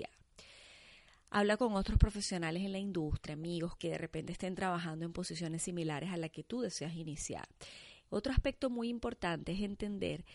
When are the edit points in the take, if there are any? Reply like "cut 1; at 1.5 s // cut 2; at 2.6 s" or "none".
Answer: cut 1; at 3.8 s // cut 2; at 8.1 s